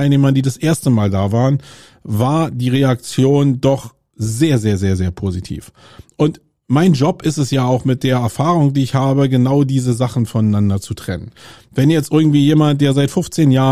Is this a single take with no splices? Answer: yes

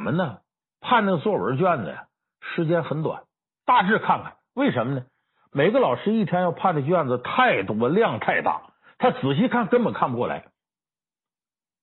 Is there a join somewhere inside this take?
no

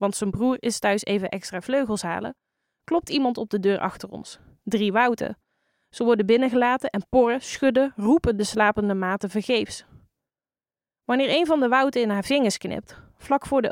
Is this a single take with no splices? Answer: yes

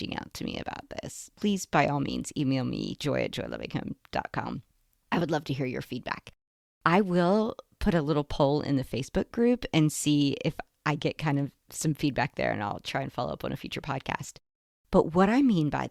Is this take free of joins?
yes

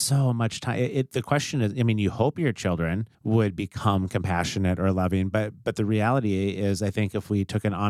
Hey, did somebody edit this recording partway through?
yes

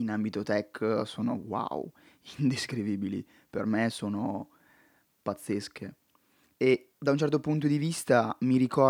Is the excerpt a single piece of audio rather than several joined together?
yes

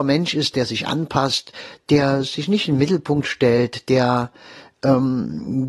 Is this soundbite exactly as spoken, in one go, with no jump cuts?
yes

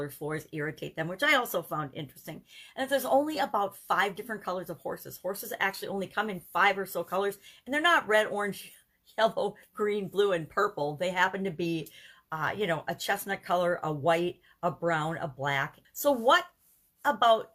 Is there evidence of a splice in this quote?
yes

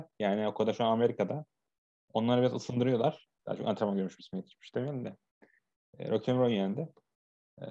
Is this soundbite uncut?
no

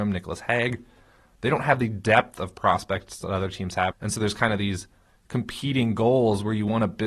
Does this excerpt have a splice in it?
yes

